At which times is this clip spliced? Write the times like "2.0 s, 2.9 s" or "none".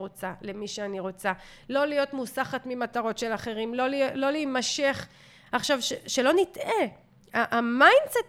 5.5 s